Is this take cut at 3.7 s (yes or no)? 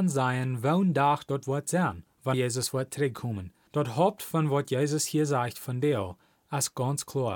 yes